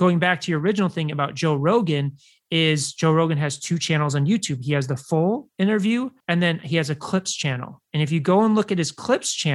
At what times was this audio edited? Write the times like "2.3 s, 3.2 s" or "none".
none